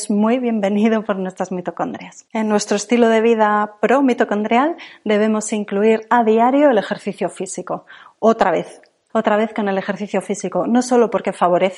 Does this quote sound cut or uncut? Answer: cut